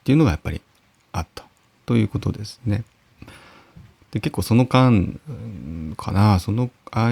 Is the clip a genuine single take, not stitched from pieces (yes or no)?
no